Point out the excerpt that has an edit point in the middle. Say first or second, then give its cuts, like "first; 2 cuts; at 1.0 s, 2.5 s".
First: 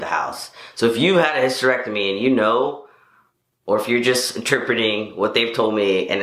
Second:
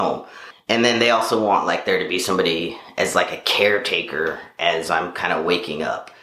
first; 1 cut; at 3.4 s